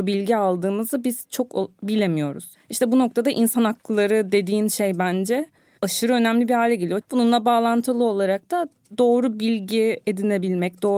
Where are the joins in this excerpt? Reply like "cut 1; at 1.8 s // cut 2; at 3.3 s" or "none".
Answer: cut 1; at 7.0 s